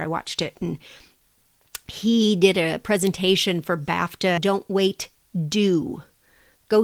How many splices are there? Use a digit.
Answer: 1